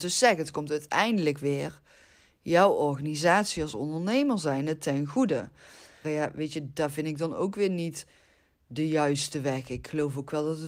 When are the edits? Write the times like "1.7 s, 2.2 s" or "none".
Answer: 6.0 s